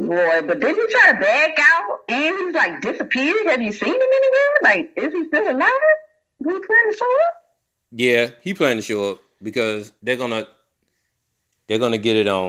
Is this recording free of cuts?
no; 1 cut; at 10.0 s

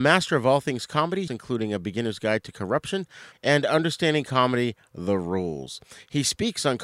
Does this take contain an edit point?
yes; 2 cuts; at 1.3 s, 3.3 s

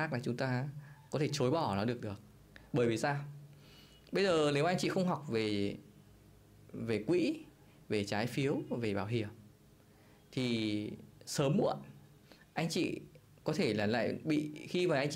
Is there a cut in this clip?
no; 0 cuts

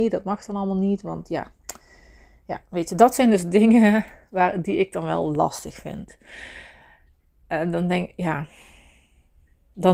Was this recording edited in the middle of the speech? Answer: no; 0 cuts

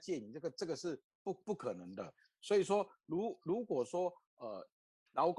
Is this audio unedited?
yes; 0 cuts

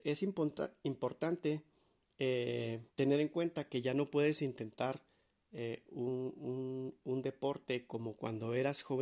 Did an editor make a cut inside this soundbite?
yes; 1 cut; at 2.9 s

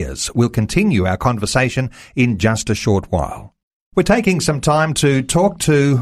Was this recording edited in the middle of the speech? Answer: no; 0 cuts

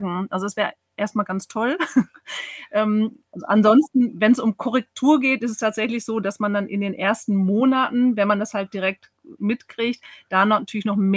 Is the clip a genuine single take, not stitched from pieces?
yes; 0 cuts

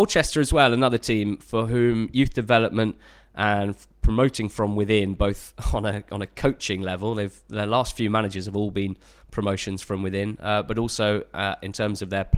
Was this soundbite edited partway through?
no; 0 cuts

